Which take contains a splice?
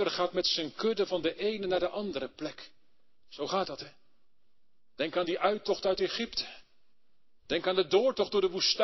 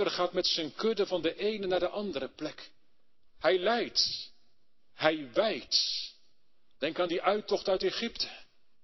second; 2 cuts; at 3.2 s, 6.7 s

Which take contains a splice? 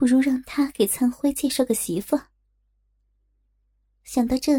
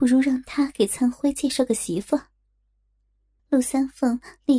second; 1 cut; at 3.4 s

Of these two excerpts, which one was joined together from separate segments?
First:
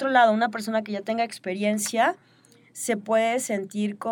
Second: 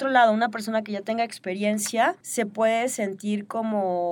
second; 1 cut; at 2.2 s

